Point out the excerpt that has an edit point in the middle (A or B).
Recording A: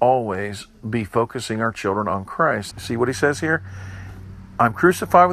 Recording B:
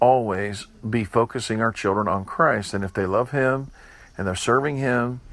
A